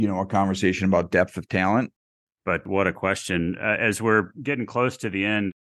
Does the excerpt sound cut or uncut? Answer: cut